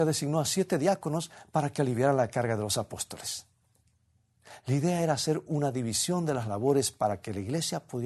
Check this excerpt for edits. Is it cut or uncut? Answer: uncut